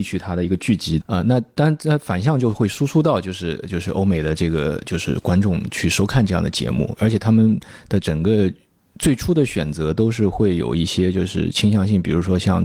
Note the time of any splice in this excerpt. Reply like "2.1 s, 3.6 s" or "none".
1.0 s